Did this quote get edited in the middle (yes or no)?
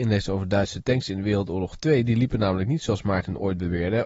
no